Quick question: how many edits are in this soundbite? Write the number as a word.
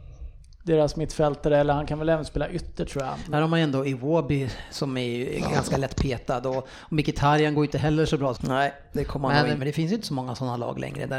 three